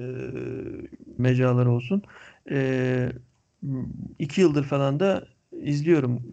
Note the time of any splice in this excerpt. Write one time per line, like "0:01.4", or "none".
0:01.2
0:02.4